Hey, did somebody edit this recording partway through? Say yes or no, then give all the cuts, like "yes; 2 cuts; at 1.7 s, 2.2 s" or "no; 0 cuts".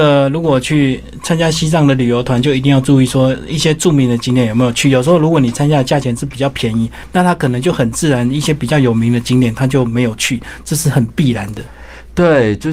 no; 0 cuts